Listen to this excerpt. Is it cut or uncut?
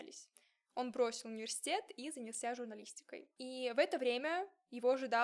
cut